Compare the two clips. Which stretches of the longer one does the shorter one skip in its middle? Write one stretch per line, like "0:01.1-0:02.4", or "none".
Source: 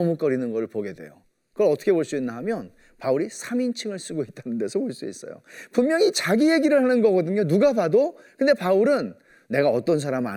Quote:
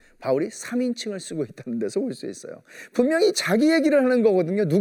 none